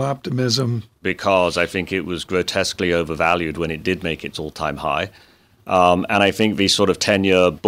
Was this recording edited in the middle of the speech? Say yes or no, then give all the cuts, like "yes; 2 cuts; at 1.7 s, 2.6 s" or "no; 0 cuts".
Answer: yes; 1 cut; at 1.0 s